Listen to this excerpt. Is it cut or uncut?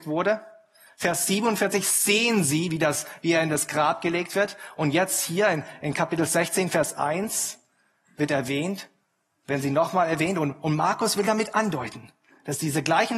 uncut